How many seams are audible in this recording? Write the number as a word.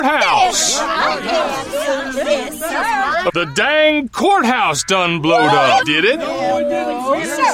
two